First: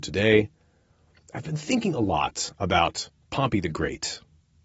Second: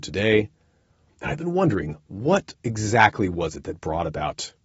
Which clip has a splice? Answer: second; 2 cuts; at 1.1 s, 2.6 s

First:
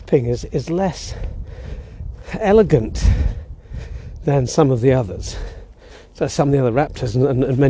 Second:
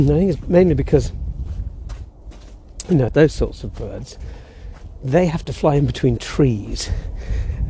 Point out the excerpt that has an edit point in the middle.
second; 1 cut; at 3.1 s

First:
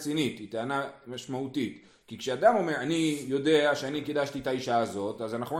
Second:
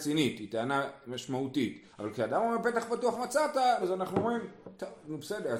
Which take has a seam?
second; 2 cuts; at 1.9 s, 3.8 s

